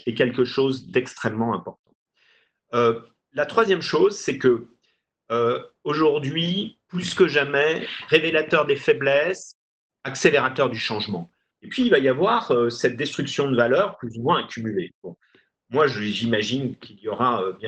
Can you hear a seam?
yes; 2 cuts; at 9.9 s, 11.5 s

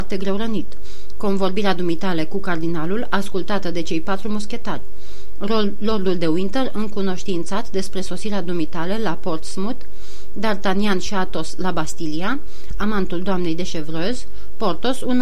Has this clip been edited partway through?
yes; 1 cut; at 12.7 s

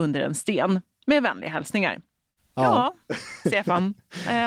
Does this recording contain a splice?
no; 0 cuts

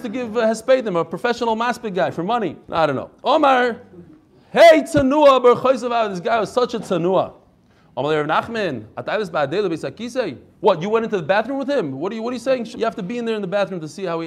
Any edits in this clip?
yes; 2 cuts; at 2.6 s, 12.7 s

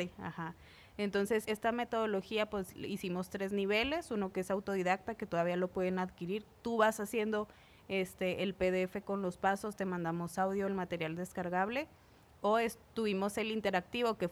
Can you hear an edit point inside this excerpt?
yes; 1 cut; at 1.4 s

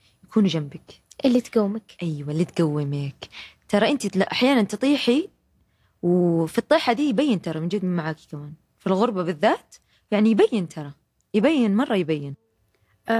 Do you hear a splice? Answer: no; 0 cuts

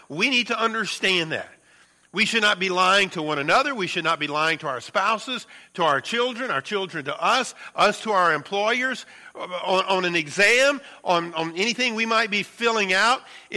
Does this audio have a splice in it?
no; 0 cuts

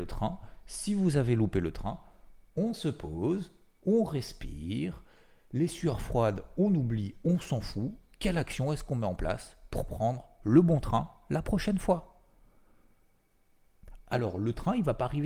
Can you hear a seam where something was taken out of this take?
no; 0 cuts

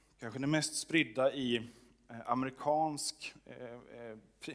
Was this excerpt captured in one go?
yes; 0 cuts

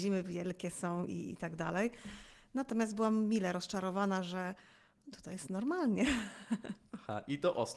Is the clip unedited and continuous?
yes; 0 cuts

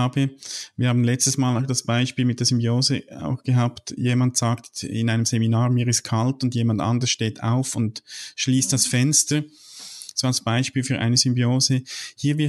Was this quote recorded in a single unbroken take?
yes; 0 cuts

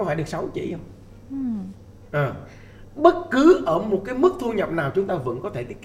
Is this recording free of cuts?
no; 1 cut; at 2.1 s

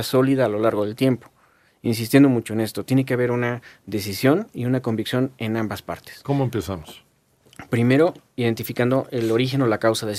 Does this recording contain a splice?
no; 0 cuts

